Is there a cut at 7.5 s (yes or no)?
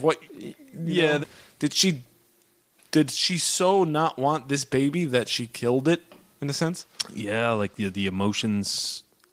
no